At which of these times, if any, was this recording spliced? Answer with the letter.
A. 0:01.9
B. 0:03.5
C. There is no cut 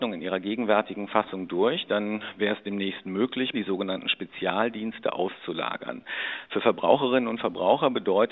B